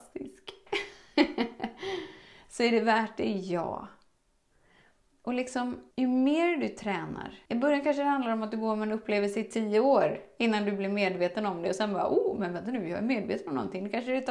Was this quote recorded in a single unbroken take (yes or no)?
no